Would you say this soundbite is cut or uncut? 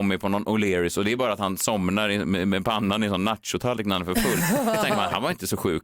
uncut